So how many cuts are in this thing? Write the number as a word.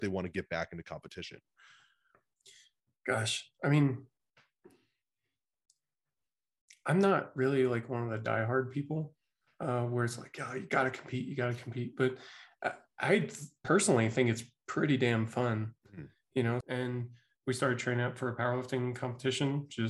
one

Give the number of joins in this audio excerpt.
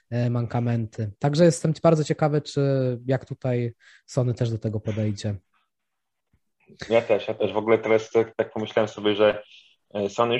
zero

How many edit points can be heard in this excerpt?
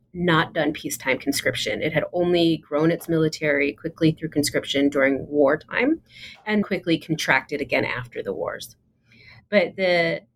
one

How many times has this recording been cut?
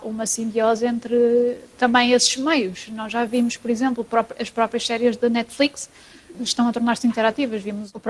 one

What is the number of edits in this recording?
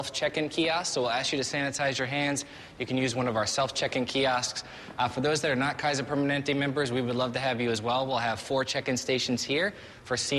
zero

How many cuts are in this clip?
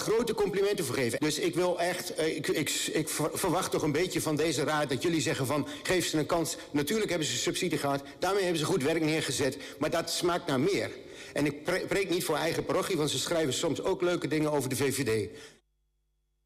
one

